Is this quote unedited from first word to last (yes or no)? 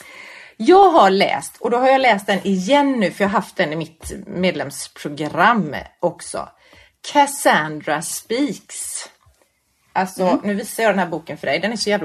yes